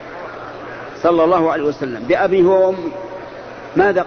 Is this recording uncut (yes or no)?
yes